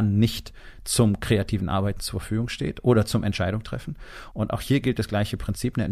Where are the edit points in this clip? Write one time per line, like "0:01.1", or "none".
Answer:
0:04.3